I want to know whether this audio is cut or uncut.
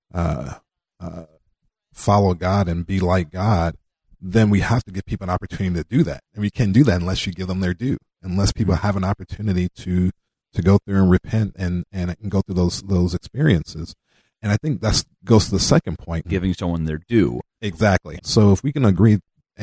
cut